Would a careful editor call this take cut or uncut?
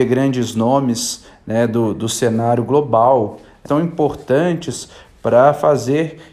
cut